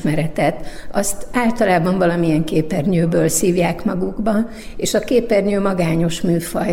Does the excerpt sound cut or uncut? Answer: uncut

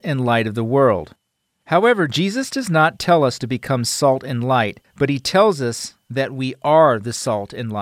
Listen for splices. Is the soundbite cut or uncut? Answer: uncut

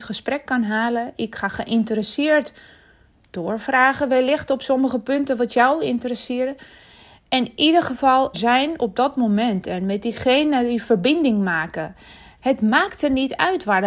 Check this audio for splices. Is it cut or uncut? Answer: cut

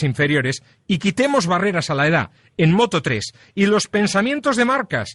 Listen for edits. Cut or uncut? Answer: uncut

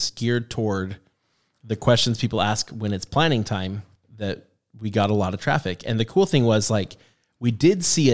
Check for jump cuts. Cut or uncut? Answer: uncut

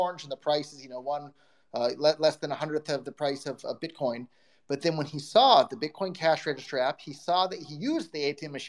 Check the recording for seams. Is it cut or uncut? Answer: uncut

